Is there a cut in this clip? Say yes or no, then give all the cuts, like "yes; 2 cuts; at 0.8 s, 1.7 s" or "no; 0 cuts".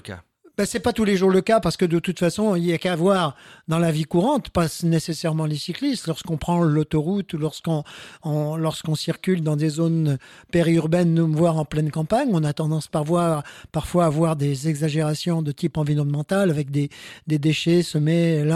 no; 0 cuts